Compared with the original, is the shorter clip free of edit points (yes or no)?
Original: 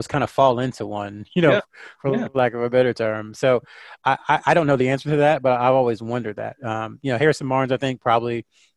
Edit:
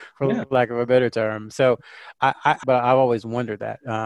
no